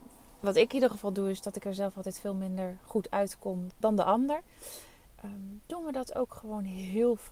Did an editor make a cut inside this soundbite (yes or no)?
yes